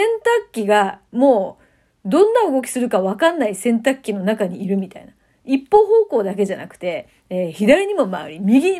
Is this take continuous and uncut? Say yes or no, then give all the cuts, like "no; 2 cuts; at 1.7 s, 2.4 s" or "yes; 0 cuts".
yes; 0 cuts